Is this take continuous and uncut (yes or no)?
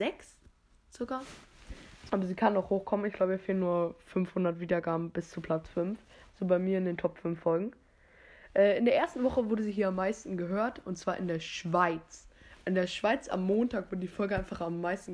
no